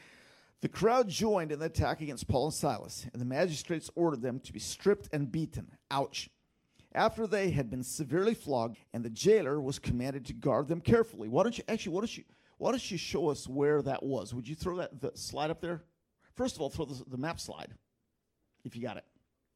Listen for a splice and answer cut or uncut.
cut